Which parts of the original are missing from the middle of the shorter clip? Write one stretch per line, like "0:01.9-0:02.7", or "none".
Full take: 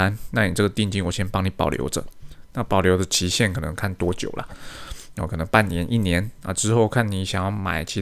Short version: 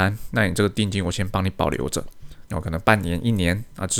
0:02.5-0:05.1